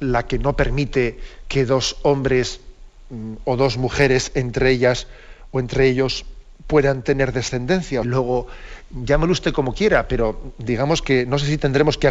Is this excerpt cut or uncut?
cut